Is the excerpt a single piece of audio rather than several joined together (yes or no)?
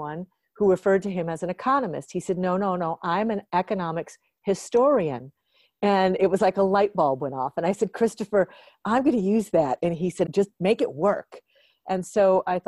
no